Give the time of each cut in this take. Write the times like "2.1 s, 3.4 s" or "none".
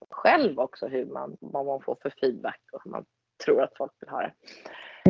1.4 s

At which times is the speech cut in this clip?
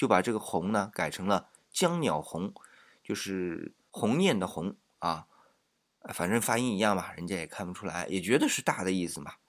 none

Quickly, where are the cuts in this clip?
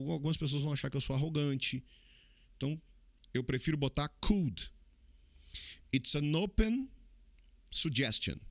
none

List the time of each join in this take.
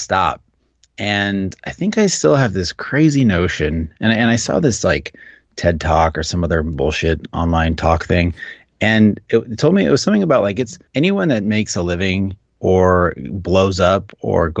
10.9 s

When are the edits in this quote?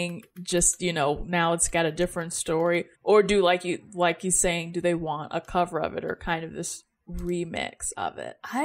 2.9 s

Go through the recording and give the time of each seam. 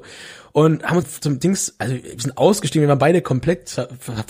1.0 s

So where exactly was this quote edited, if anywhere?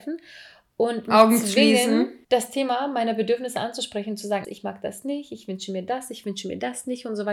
2.2 s, 4.4 s

